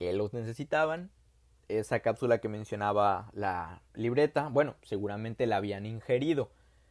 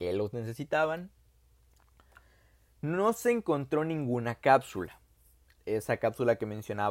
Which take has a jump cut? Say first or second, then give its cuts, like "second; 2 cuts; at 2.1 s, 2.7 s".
first; 1 cut; at 1.6 s